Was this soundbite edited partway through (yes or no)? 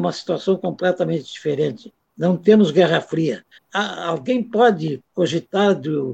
yes